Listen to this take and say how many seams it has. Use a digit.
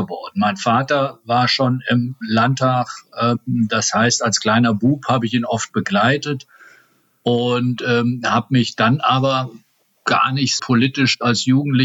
1